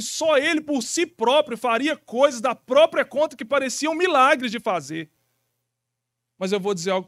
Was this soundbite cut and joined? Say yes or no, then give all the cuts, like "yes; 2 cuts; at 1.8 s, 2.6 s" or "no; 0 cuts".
no; 0 cuts